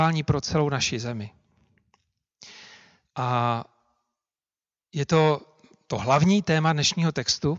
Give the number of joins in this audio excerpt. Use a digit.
1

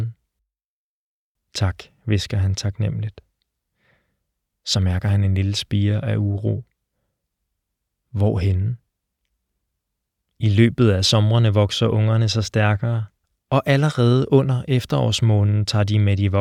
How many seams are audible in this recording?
2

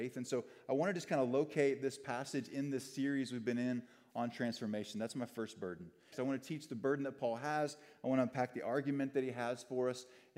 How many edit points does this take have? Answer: 1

